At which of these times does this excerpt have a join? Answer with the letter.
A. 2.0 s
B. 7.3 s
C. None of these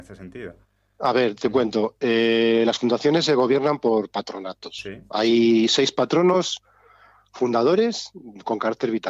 C